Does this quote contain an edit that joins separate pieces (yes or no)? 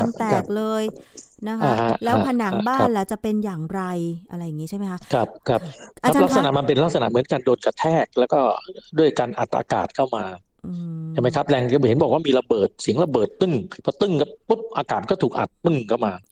yes